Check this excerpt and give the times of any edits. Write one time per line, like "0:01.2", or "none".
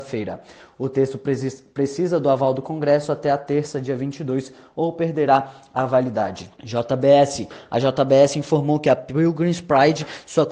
0:06.6

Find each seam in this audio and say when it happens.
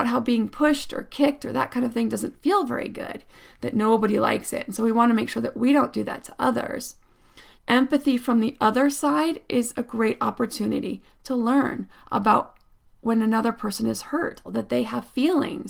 0:07.6
0:14.4

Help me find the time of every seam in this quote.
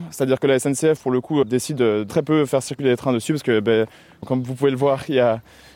0:02.1

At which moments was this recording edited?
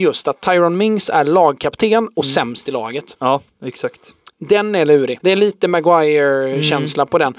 0:05.2

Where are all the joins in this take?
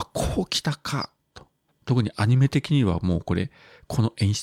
0:01.7

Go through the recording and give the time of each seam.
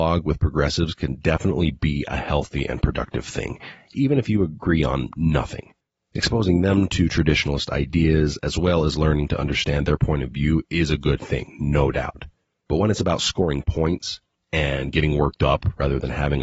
none

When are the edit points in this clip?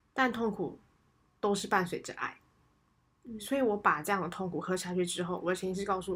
none

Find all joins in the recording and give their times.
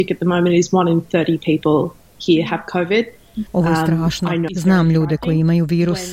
0:04.5

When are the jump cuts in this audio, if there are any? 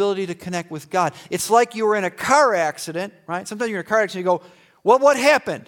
none

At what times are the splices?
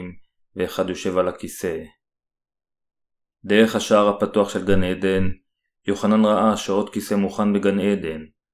none

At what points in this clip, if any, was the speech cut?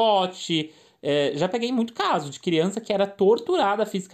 none

